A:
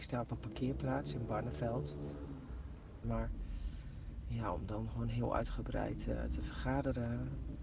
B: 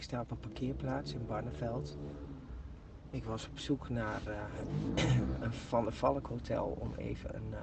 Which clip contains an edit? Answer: A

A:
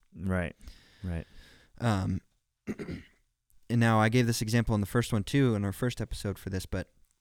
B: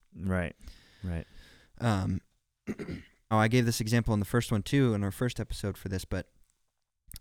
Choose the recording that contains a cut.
B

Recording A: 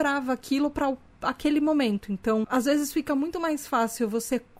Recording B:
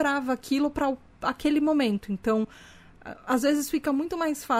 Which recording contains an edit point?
A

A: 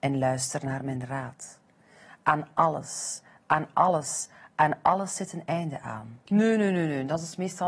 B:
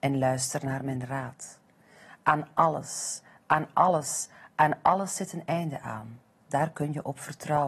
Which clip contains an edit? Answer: A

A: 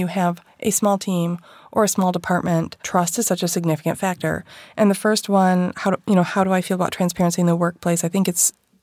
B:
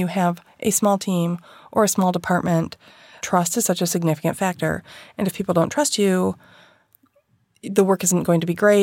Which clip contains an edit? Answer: A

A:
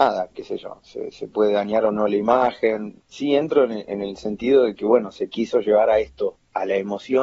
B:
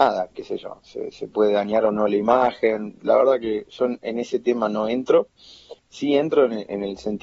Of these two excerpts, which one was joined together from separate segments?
A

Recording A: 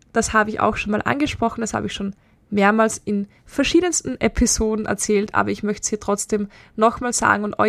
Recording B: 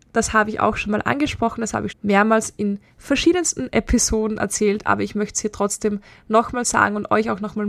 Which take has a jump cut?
B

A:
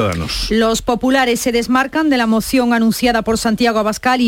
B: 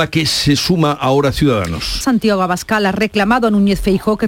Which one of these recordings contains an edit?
B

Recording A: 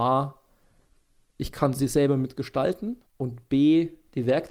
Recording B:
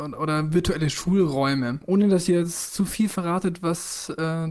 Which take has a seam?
A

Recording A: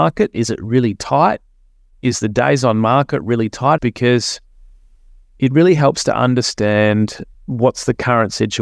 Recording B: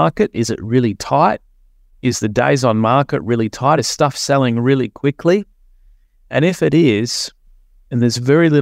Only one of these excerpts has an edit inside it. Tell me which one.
A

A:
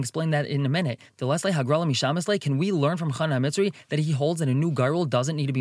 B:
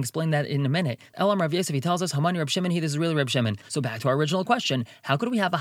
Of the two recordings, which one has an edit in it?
B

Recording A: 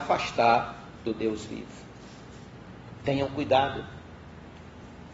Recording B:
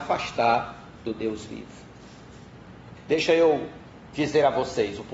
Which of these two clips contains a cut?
B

